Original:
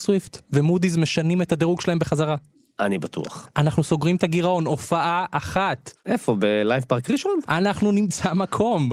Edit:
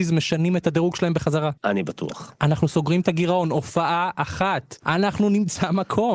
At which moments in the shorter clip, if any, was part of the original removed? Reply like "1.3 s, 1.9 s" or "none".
1.6 s, 4.8 s